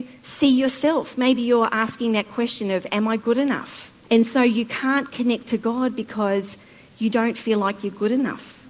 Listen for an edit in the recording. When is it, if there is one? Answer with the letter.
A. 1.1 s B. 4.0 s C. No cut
B